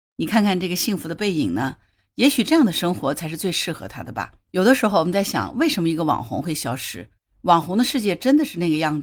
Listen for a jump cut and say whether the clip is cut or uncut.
uncut